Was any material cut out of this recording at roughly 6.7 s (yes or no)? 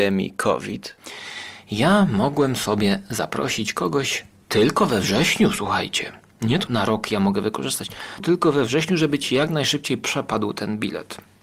yes